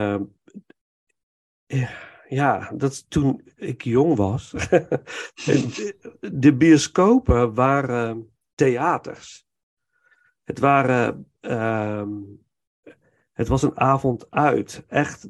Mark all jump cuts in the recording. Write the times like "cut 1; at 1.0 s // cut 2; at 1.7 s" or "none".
none